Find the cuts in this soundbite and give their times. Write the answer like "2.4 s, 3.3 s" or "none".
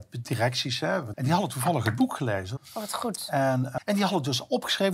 1.1 s, 2.6 s, 3.8 s